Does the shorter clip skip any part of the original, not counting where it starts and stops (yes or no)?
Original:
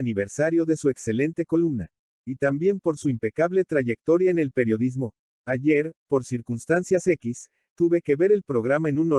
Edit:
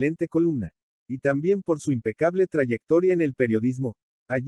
no